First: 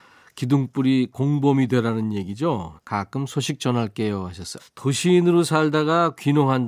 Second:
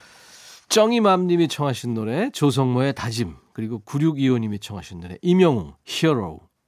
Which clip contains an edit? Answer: first; 2 cuts; at 2.8 s, 4.6 s

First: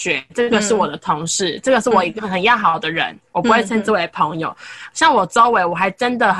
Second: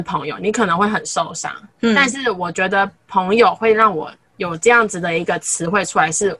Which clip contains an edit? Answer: first; 1 cut; at 2.2 s

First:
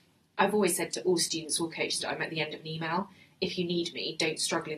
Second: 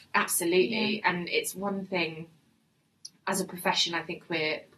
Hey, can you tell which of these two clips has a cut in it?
first; 1 cut; at 2.0 s

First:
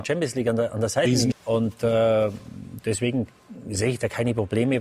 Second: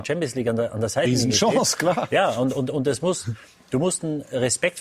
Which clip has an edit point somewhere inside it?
first; 1 cut; at 1.3 s

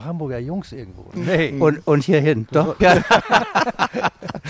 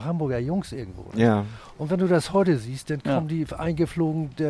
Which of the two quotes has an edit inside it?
first; 2 cuts; at 1.2 s, 2.8 s

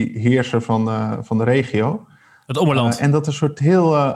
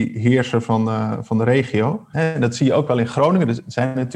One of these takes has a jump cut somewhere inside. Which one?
second; 1 cut; at 2.1 s

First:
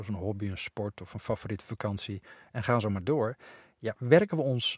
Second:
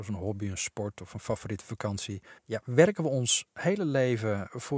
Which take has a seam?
second; 1 cut; at 2.4 s

